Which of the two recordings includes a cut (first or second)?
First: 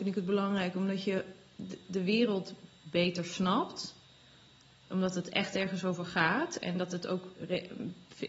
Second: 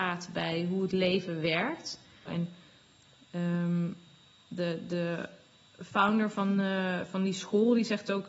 second